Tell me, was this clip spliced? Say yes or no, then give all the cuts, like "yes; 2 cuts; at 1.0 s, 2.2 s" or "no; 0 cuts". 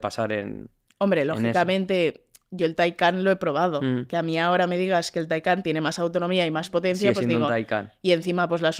no; 0 cuts